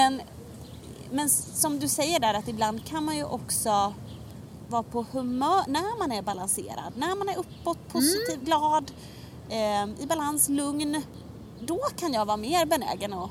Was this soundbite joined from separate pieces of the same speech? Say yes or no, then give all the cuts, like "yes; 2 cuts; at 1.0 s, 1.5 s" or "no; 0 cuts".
no; 0 cuts